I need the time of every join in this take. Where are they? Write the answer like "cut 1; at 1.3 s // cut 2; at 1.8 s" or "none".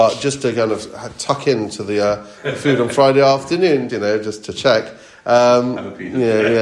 cut 1; at 3.9 s